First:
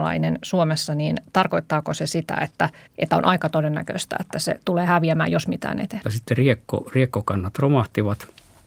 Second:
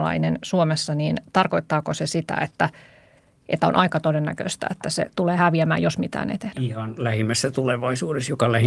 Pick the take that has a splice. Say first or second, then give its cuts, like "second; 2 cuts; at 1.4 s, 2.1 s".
first; 2 cuts; at 2.9 s, 6.0 s